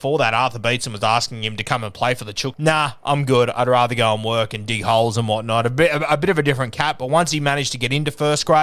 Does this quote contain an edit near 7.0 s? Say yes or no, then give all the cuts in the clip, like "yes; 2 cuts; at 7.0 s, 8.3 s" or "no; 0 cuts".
no; 1 cut; at 2.5 s